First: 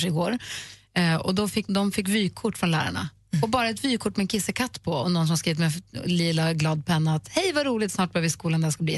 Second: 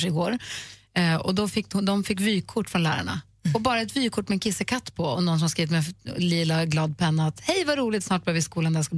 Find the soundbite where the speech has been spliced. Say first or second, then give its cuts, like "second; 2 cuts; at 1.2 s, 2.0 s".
first; 1 cut; at 1.7 s